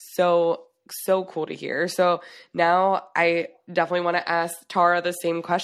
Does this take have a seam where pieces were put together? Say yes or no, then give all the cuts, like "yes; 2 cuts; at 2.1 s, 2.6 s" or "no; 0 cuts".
no; 0 cuts